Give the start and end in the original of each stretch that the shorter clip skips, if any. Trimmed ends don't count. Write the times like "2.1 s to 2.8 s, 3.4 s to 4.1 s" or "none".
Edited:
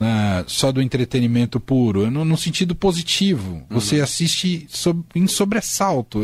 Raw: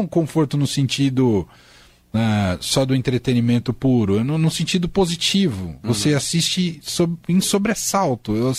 none